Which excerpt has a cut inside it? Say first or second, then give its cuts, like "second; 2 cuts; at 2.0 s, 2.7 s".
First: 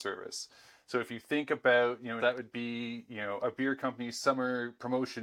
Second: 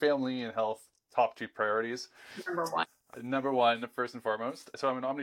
first; 1 cut; at 2.2 s